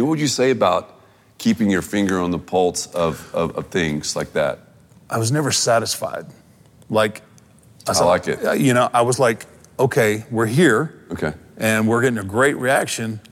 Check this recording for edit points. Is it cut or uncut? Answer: uncut